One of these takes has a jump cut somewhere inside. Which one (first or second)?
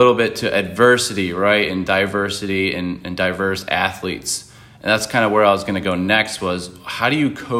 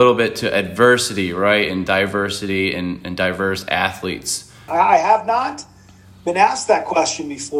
second